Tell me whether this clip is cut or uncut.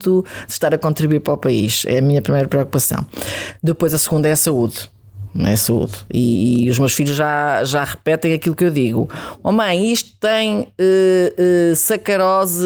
uncut